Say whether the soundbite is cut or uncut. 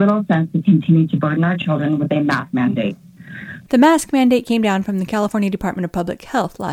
cut